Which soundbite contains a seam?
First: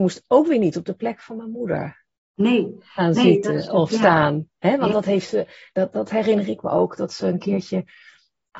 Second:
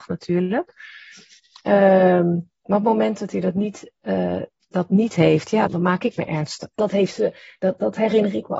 second; 2 cuts; at 5.7 s, 6.8 s

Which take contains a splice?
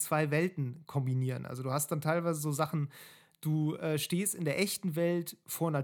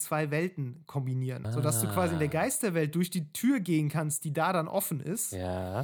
second; 1 cut; at 1.4 s

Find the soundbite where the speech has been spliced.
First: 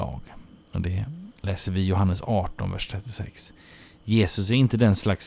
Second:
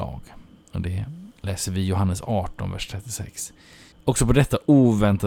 second; 1 cut; at 3.9 s

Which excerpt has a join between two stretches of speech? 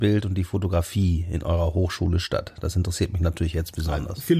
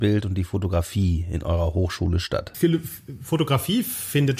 second; 1 cut; at 2.5 s

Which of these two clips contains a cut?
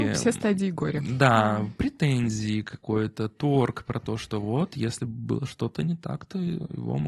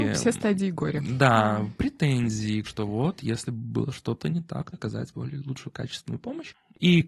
second; 2 cuts; at 2.6 s, 4.7 s

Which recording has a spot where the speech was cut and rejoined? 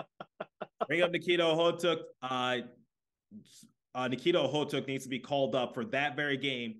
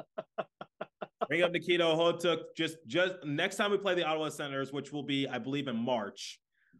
first; 1 cut; at 2.1 s

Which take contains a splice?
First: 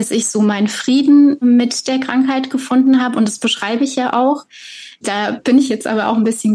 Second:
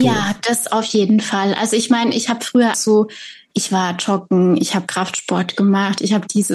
second; 1 cut; at 2.7 s

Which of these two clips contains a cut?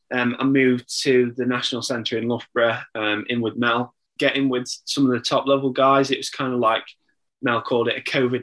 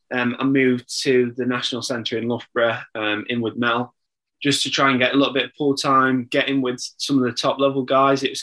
first; 1 cut; at 4.2 s

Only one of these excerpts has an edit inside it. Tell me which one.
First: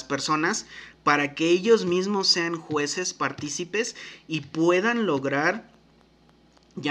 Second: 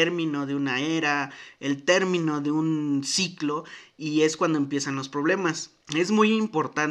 second; 1 cut; at 5.8 s

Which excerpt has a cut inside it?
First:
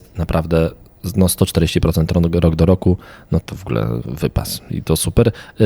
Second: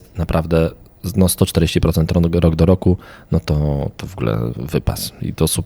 first; 1 cut; at 3.4 s

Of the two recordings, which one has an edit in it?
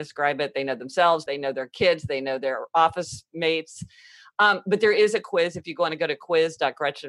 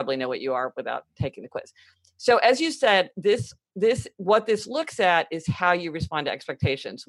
first; 1 cut; at 1.3 s

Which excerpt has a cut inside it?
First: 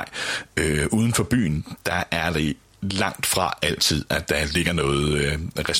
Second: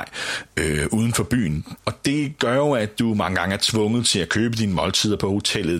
second; 1 cut; at 1.8 s

